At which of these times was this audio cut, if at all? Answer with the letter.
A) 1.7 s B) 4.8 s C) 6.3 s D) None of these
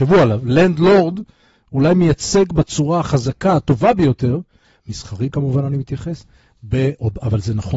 B